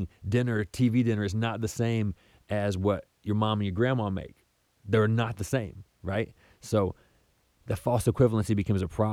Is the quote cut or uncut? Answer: uncut